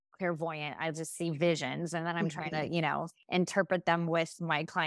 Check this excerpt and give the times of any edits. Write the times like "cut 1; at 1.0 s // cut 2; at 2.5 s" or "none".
none